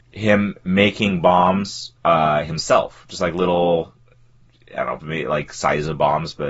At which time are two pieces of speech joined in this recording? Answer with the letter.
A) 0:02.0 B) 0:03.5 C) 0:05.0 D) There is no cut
C